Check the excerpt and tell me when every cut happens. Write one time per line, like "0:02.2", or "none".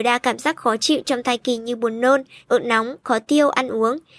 0:02.4